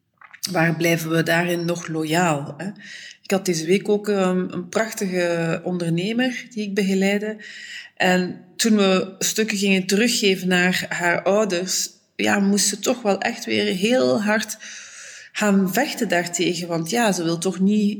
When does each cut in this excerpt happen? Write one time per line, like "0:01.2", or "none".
none